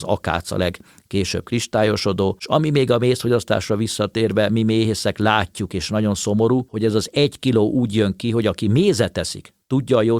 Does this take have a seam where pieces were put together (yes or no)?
no